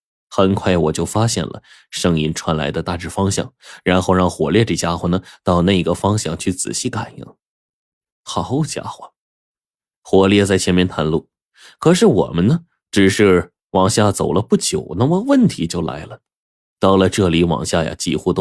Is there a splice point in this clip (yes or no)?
yes